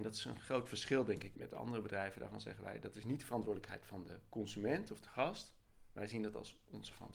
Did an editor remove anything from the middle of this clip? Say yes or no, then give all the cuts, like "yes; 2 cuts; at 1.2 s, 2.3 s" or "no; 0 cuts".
yes; 1 cut; at 1.3 s